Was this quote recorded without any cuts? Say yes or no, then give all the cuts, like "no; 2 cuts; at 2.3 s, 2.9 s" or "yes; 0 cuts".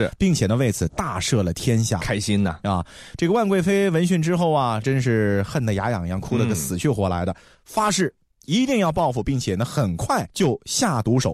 yes; 0 cuts